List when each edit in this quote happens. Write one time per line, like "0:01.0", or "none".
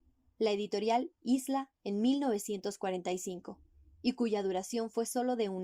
none